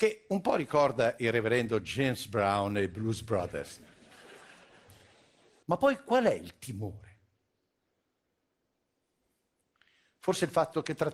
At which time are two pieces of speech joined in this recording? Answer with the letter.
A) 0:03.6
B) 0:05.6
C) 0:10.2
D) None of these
B